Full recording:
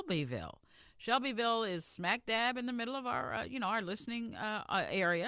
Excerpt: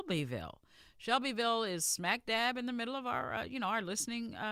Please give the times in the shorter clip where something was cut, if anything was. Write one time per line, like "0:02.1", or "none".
none